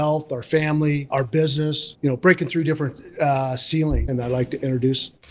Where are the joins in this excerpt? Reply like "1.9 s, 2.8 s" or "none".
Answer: 1.1 s, 4.1 s

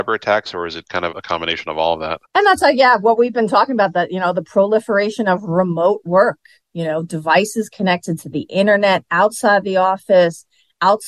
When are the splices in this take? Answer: 1.1 s, 2.2 s

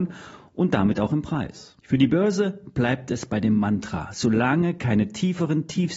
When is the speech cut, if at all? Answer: 1.8 s

